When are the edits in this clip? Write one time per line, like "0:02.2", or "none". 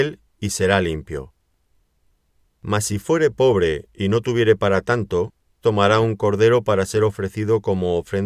0:05.6